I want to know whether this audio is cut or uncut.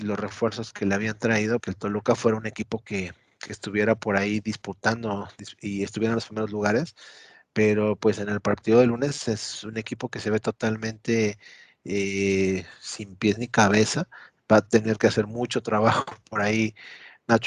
cut